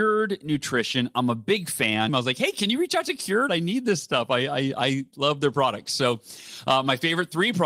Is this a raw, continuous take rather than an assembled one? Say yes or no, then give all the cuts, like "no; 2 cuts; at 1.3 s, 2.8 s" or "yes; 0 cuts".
no; 2 cuts; at 2.1 s, 3.5 s